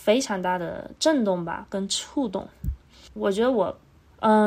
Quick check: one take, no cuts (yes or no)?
no